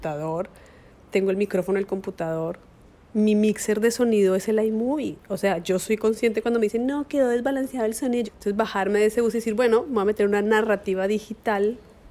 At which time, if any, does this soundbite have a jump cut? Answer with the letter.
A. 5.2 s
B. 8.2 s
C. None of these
B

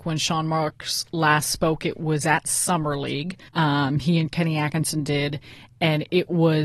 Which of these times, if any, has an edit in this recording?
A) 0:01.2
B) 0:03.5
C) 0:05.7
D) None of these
B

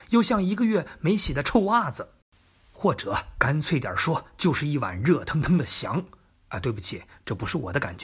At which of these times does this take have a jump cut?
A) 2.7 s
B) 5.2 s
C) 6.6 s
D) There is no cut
D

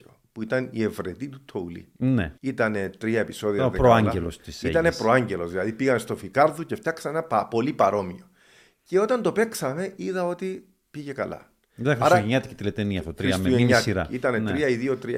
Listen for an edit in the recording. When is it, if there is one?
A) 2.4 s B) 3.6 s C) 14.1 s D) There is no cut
A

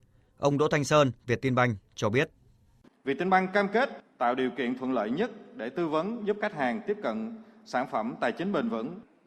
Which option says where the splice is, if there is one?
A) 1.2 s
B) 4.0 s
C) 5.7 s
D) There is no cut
A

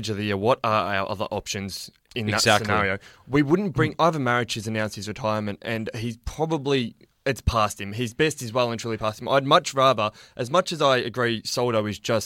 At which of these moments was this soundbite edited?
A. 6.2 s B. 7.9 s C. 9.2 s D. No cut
D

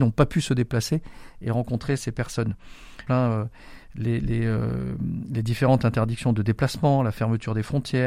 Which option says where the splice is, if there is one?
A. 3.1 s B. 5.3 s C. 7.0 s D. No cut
A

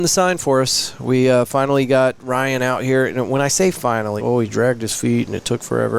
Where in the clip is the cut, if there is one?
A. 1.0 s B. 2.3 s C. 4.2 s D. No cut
C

